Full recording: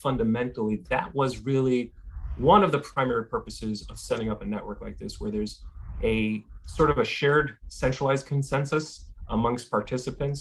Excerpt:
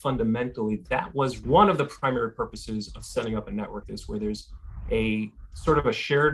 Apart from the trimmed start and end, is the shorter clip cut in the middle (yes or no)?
yes